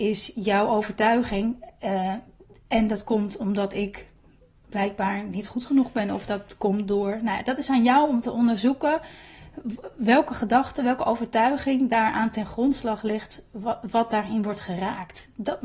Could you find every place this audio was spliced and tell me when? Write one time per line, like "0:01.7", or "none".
none

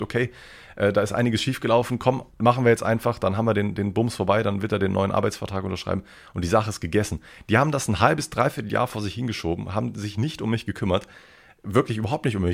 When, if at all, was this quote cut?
0:02.3

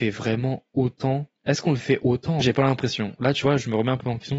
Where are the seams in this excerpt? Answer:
0:02.4

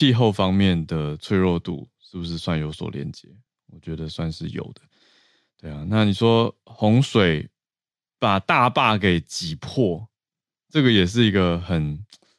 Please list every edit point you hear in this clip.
none

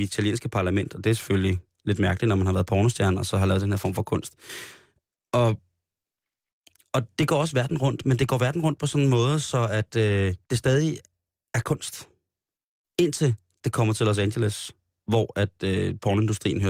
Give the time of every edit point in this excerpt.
0:07.2
0:10.4

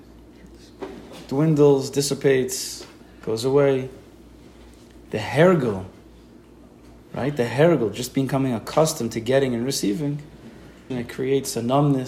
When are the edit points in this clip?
0:10.9

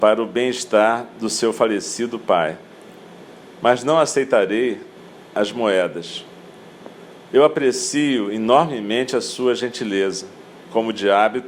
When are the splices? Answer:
0:07.3
0:10.5

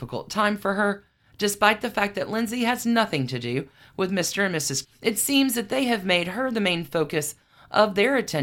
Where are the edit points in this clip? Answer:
0:04.8

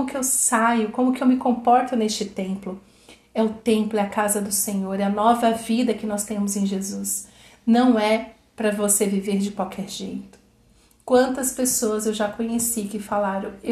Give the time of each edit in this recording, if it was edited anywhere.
none

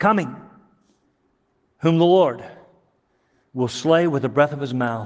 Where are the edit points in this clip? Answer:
none

